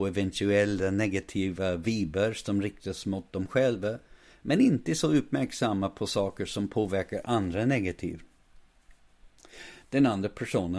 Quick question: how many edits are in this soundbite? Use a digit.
1